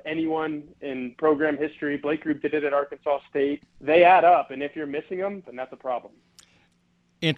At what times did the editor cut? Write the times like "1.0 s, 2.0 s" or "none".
3.6 s, 5.4 s